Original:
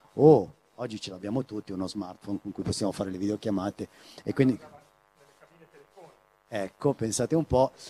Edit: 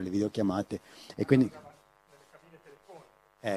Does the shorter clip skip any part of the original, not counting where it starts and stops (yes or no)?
no